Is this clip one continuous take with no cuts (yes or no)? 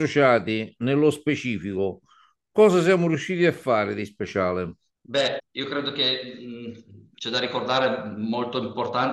no